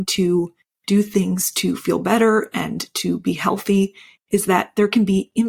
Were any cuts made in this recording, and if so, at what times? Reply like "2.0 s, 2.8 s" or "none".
none